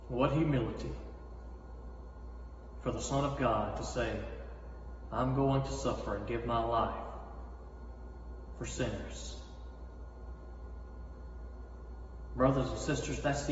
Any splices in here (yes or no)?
no